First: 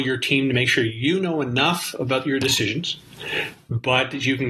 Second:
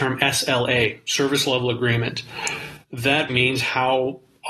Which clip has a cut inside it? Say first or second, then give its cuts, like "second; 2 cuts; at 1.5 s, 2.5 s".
second; 1 cut; at 3.3 s